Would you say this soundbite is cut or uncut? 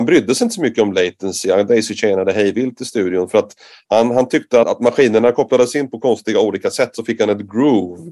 cut